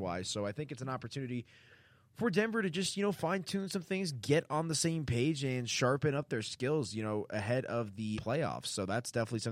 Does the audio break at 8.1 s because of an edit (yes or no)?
yes